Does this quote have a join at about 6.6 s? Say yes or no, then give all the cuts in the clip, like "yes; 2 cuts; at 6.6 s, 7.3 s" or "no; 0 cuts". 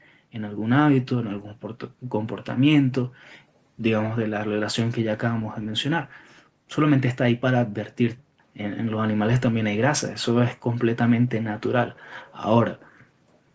no; 1 cut; at 8.4 s